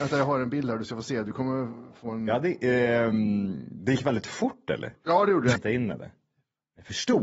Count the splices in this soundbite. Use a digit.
1